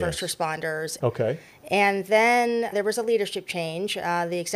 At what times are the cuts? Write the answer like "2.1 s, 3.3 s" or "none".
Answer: 1.0 s, 2.7 s